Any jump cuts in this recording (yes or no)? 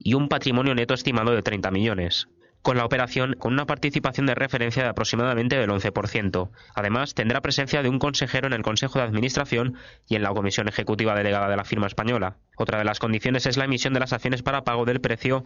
yes